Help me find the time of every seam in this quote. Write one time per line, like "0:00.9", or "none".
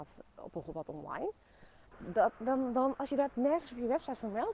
0:01.9

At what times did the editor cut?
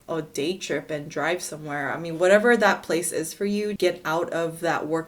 0:03.8

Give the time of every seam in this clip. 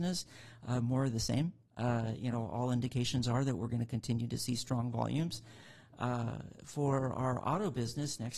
none

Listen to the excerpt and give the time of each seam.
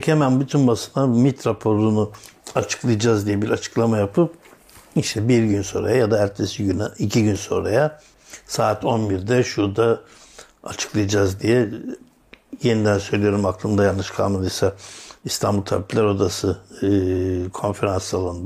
none

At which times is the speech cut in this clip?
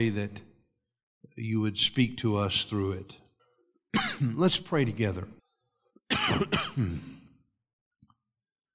0:03.4
0:05.4

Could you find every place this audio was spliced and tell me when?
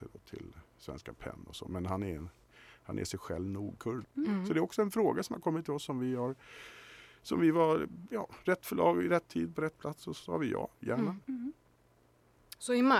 0:04.0
0:11.2

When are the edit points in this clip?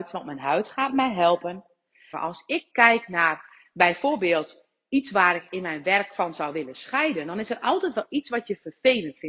0:02.1

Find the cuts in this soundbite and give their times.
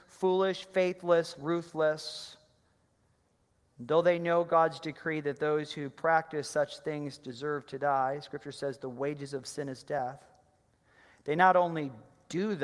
0:01.3

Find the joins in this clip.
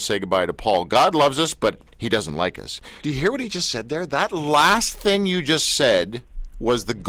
0:03.0

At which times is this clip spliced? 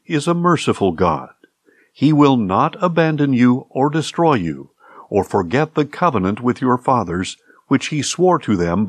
none

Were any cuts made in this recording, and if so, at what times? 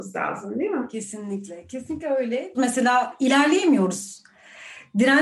0:02.5

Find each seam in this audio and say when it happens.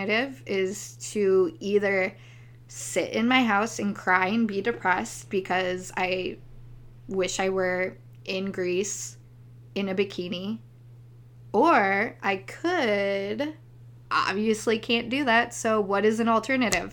0:14.1

